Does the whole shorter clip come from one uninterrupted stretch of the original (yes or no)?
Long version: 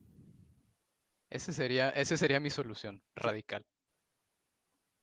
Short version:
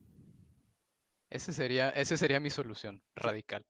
yes